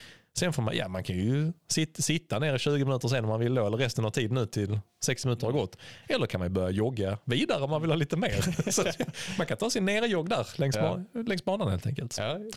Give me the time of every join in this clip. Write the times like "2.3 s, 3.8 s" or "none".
none